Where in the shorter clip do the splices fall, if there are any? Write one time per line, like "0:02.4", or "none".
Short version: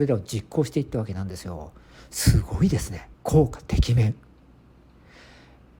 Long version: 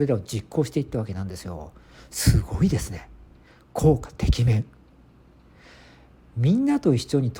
0:03.1